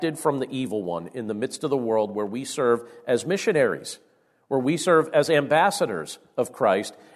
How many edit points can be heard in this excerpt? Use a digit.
0